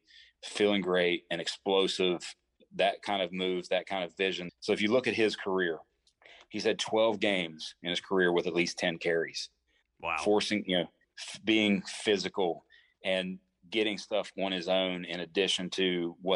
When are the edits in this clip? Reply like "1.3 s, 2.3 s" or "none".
4.5 s, 9.8 s, 11.0 s